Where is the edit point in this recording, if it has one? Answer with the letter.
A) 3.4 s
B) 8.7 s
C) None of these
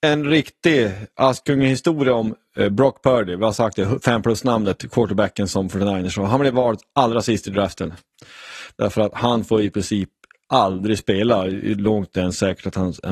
B